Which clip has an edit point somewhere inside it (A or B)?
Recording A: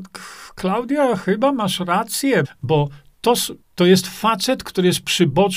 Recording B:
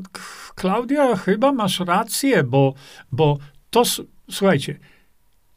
A